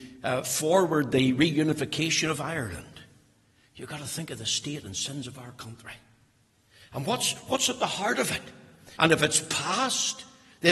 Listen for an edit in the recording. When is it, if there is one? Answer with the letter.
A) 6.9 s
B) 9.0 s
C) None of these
B